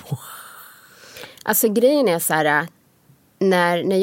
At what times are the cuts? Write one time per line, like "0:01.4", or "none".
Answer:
none